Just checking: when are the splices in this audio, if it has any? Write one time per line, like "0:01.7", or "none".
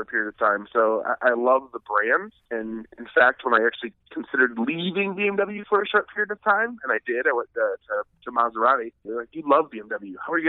0:09.1